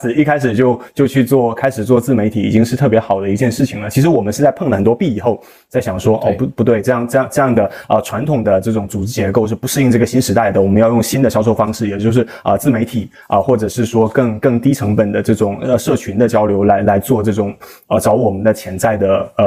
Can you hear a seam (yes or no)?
no